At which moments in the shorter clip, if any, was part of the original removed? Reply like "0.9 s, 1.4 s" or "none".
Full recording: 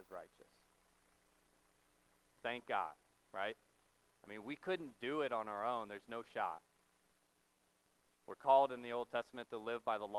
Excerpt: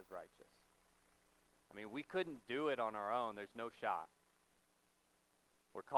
1.6 s

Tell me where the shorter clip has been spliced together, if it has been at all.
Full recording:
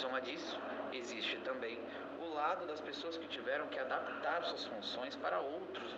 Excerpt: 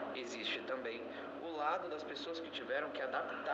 none

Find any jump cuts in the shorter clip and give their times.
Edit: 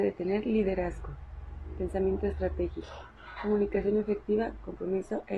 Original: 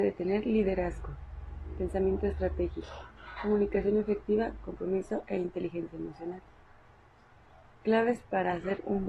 none

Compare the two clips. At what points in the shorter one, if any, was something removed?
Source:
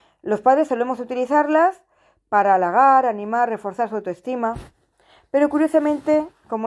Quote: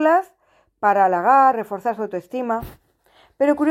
1.5 s

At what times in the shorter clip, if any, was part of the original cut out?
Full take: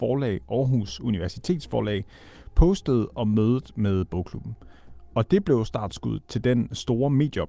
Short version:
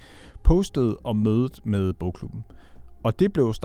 none

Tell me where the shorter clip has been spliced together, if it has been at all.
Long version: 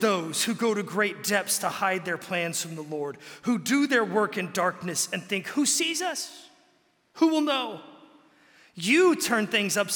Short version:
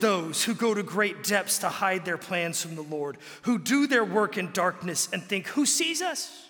none

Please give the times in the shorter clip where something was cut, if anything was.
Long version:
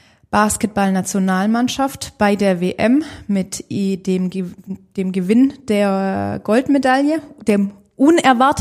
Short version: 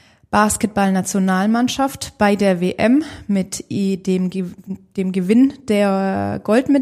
none

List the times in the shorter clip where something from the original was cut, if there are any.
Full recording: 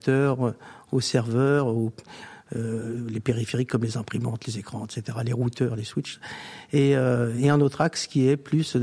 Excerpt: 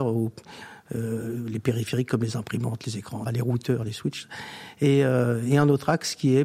3.3 s

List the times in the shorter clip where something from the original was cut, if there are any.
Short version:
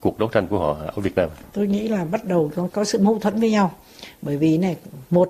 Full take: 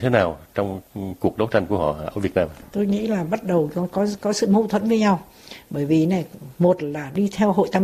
2.7 s

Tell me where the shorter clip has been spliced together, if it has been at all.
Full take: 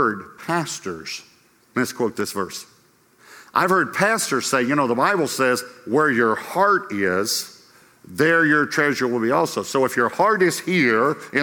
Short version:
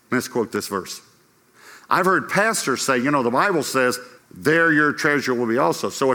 4.2 s

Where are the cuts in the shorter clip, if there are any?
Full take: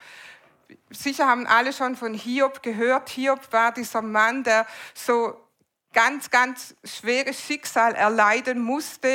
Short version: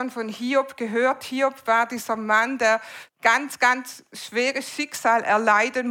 3.1 s

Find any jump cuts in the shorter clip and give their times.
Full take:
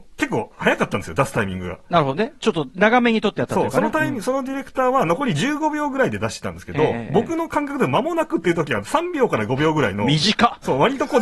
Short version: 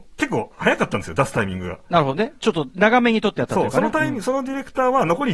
none

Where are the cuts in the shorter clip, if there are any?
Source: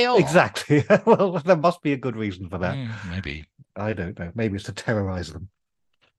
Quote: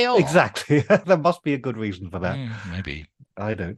1.0 s

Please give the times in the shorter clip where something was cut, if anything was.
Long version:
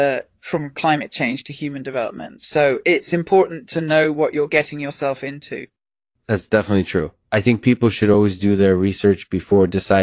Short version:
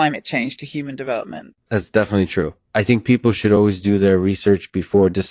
1.5 s

